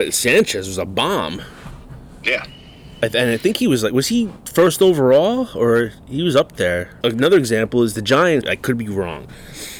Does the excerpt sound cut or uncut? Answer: cut